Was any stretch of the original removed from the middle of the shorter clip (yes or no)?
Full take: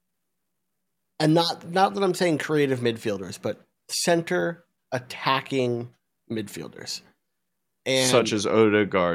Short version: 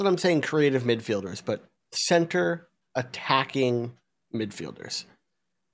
no